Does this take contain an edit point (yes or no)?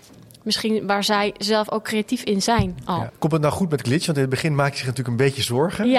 yes